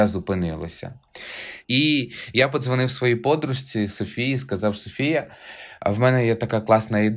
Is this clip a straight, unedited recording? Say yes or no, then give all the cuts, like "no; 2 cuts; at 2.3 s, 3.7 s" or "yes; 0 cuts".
no; 1 cut; at 1.6 s